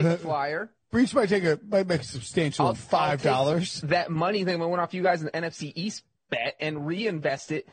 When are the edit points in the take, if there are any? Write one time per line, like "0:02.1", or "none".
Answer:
0:02.7